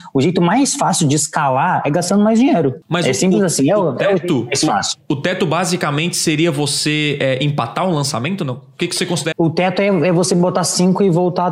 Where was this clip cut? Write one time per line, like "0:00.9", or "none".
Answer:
0:09.3

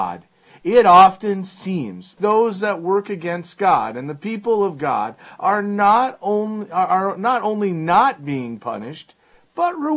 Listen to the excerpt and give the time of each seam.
0:02.2

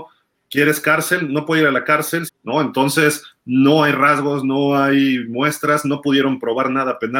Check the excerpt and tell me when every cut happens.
0:02.3

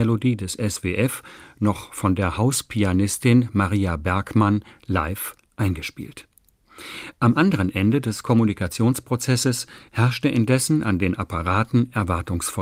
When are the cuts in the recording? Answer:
0:09.9

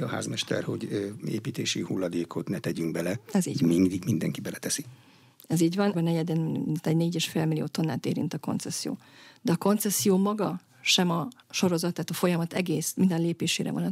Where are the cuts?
0:05.9

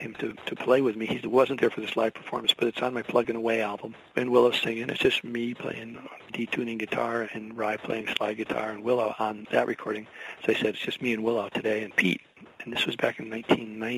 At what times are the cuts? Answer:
0:07.2

